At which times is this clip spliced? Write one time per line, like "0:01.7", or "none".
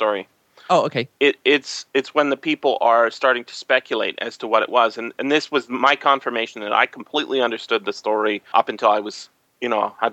0:01.2
0:08.5